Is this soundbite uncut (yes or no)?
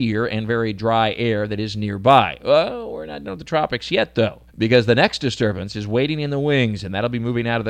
no